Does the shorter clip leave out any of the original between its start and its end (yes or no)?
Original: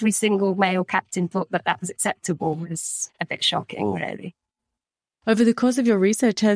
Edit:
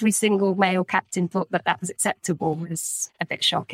no